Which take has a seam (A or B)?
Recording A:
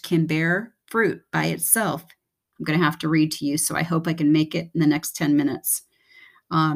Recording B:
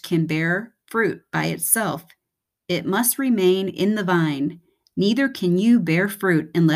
A